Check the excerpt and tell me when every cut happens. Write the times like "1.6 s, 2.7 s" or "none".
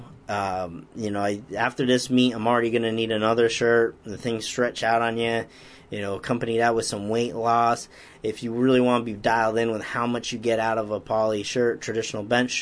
none

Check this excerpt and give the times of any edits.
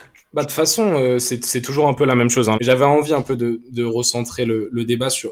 2.5 s

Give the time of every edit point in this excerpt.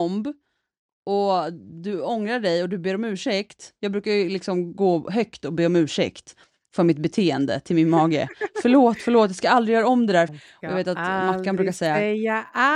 10.3 s

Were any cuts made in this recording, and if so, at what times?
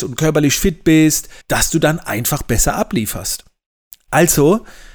1.4 s

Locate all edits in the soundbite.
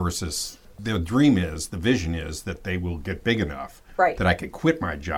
none

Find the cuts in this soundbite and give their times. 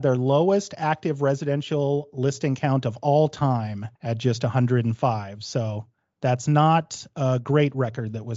4.0 s

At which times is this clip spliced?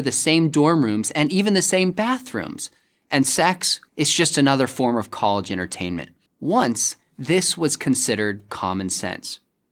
3.9 s, 6.3 s

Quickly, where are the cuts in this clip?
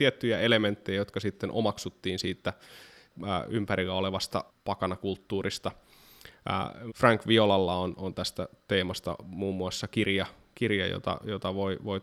6.9 s

